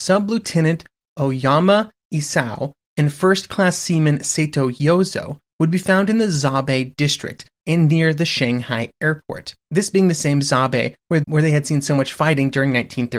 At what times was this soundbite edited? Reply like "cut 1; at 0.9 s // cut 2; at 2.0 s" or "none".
cut 1; at 9.6 s // cut 2; at 11.2 s